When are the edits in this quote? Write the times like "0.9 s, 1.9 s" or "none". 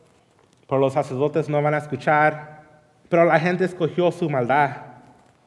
3.0 s

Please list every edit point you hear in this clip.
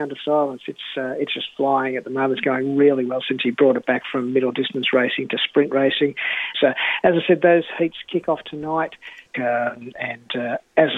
6.5 s, 9.3 s

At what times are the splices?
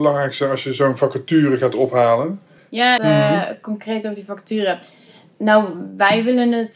3.0 s

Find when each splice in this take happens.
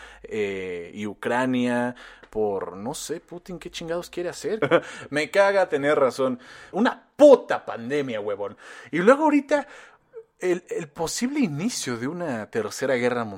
4.6 s, 6.7 s

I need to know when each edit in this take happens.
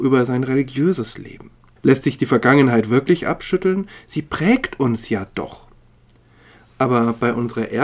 1.8 s

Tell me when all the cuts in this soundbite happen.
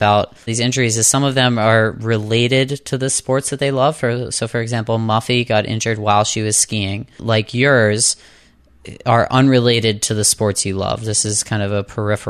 7.2 s

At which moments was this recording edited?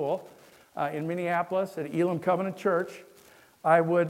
none

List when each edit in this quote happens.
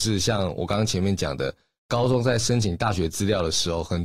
none

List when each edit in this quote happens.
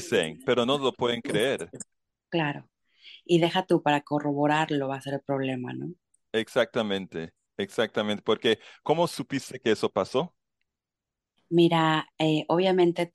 none

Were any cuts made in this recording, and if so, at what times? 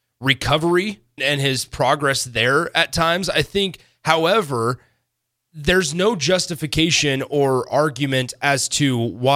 1.2 s

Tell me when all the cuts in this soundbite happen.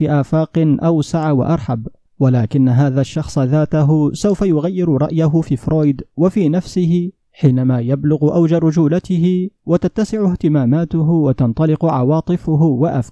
2.1 s

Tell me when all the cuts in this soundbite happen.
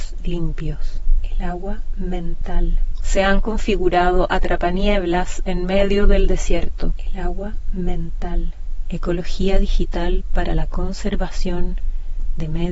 1.2 s

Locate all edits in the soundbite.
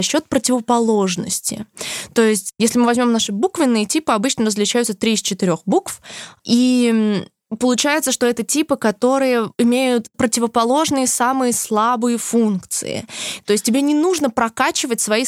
9.5 s, 13.4 s

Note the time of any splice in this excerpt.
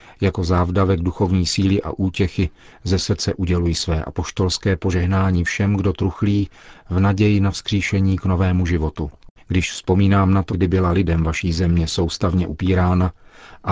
9.4 s, 10.5 s

